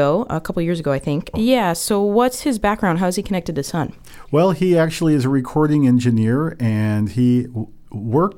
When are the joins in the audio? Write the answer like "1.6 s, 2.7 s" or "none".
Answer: 1.3 s